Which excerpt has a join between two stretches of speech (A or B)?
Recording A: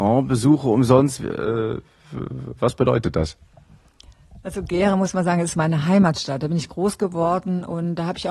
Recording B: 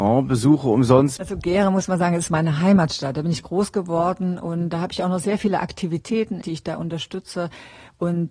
B